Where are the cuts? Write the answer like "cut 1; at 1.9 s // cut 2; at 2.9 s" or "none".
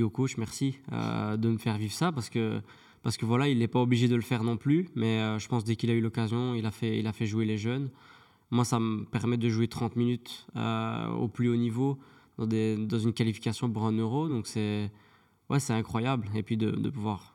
none